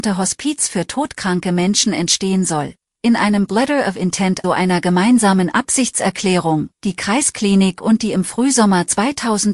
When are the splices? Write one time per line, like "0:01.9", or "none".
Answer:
0:04.4
0:06.7